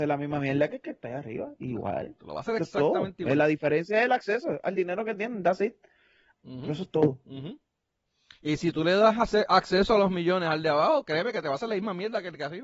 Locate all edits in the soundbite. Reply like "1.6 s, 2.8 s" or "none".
6.3 s